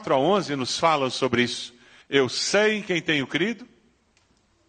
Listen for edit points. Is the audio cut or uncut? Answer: cut